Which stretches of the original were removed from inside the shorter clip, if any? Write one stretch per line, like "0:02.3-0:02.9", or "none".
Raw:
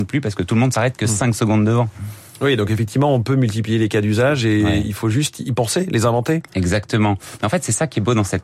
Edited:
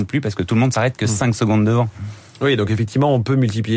none